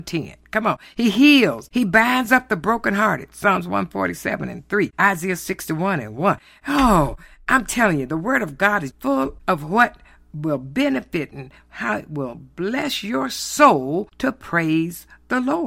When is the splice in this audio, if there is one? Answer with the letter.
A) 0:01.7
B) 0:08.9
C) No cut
B